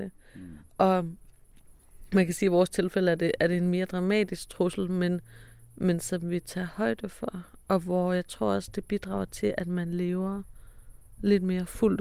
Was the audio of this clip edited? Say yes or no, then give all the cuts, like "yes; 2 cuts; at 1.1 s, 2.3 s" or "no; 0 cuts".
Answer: no; 0 cuts